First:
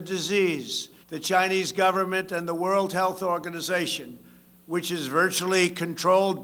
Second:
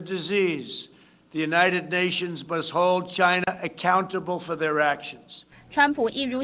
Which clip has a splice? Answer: first; 1 cut; at 1.0 s

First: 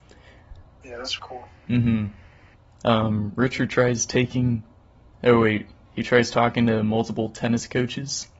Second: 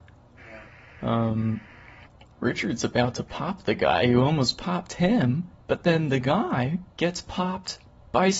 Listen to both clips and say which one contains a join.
first; 1 cut; at 1.2 s

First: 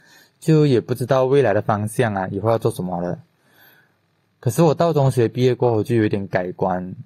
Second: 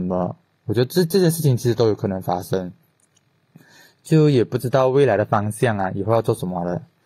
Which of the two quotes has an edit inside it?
first; 1 cut; at 4.2 s

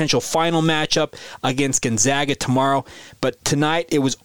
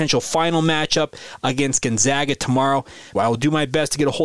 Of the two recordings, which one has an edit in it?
second; 1 cut; at 3.1 s

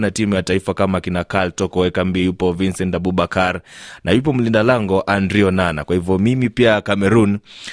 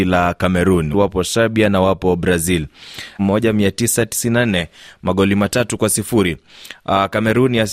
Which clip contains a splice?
second; 2 cuts; at 0.9 s, 3.2 s

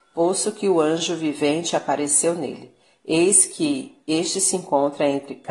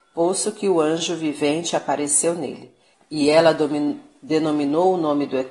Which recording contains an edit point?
second; 1 cut; at 2.9 s

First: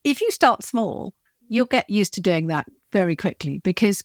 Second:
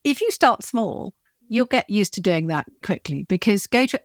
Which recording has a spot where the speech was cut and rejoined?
second; 1 cut; at 2.8 s

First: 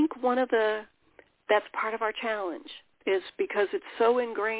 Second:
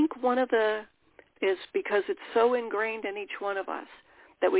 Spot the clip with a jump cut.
second; 1 cut; at 1.3 s

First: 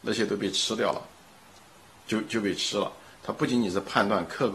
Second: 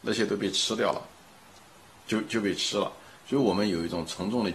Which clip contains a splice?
first; 1 cut; at 3.1 s

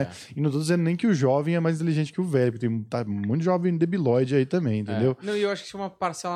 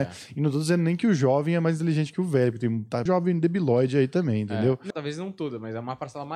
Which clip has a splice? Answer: second; 2 cuts; at 3.1 s, 4.9 s

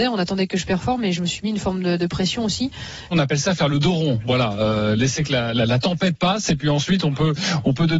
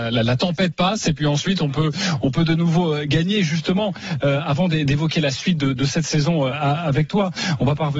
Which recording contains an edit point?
first; 1 cut; at 3.1 s

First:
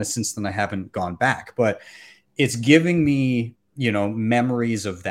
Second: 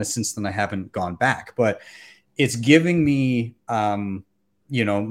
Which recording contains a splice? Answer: first; 1 cut; at 3.6 s

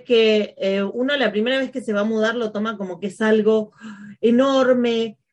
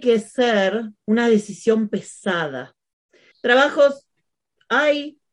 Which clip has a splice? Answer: second; 1 cut; at 3.3 s

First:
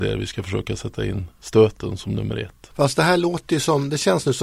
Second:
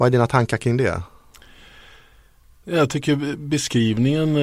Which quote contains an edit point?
first; 1 cut; at 2.7 s

